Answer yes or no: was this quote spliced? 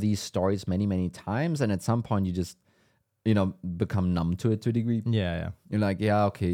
no